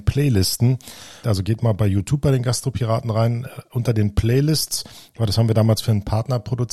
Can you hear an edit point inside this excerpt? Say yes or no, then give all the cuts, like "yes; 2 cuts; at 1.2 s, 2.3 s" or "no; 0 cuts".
yes; 1 cut; at 1.2 s